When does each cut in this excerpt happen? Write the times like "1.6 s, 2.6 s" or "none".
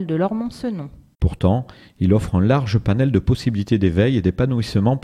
1.1 s